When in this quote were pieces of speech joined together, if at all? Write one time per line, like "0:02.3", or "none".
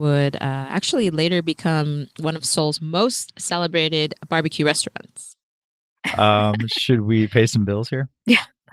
none